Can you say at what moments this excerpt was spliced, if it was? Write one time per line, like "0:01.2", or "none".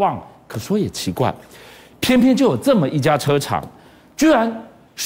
none